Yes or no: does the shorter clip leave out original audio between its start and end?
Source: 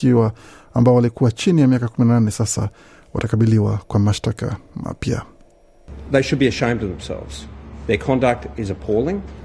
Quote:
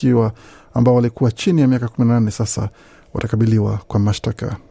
no